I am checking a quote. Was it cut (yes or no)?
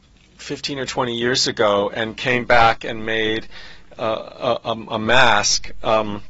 no